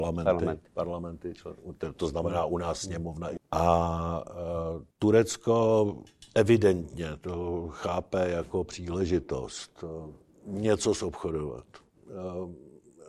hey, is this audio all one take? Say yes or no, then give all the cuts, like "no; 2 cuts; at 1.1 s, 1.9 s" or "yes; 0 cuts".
no; 2 cuts; at 3.4 s, 4.9 s